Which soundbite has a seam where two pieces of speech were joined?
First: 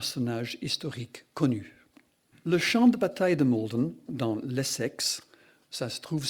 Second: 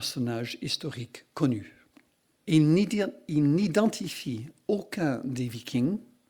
first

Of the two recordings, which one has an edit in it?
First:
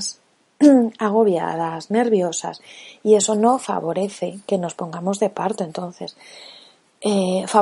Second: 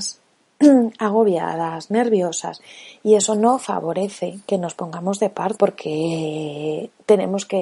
second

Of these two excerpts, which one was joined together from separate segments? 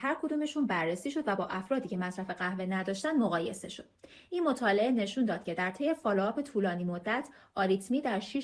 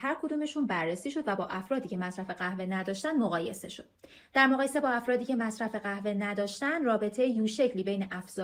second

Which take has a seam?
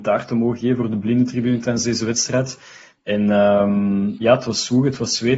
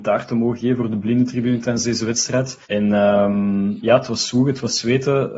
second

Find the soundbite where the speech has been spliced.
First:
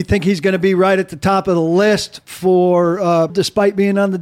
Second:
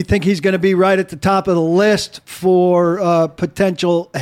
first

